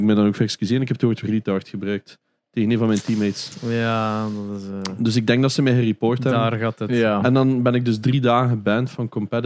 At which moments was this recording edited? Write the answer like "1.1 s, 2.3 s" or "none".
7.2 s